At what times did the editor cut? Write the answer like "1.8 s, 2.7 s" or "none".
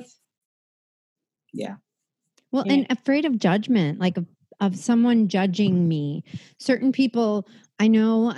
none